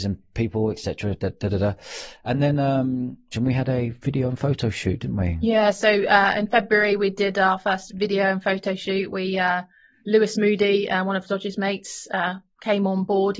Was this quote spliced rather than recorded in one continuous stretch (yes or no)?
yes